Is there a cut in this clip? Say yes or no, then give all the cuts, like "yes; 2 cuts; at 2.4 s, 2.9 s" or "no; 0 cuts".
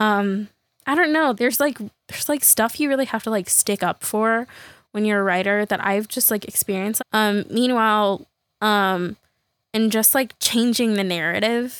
yes; 3 cuts; at 1.3 s, 7.0 s, 8.5 s